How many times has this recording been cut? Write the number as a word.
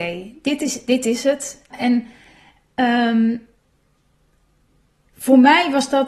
one